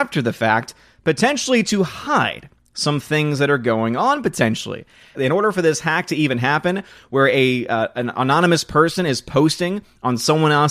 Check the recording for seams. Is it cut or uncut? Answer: cut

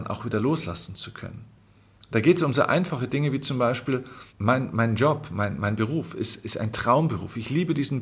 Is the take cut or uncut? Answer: cut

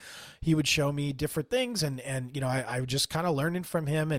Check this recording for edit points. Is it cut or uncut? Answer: uncut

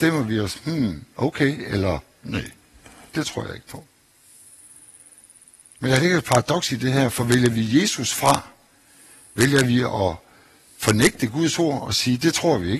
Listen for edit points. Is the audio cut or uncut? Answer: uncut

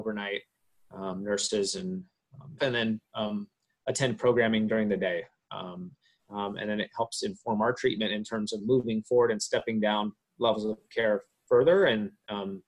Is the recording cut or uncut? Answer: cut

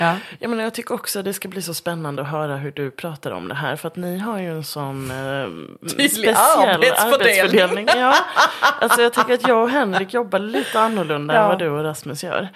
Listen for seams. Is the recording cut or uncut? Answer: uncut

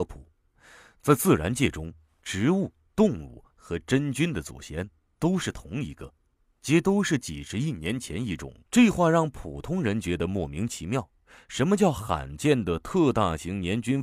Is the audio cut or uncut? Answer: cut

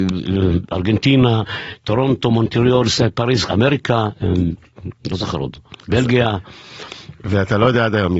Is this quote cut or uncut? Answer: cut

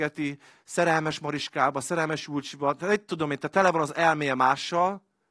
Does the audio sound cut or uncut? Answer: uncut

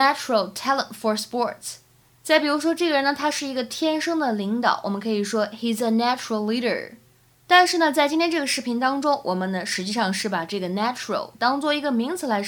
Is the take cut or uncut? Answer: uncut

